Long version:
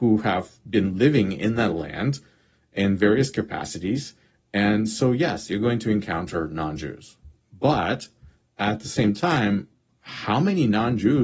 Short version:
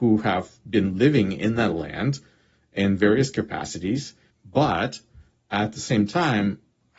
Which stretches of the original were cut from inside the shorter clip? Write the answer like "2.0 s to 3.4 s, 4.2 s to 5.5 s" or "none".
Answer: 4.3 s to 7.4 s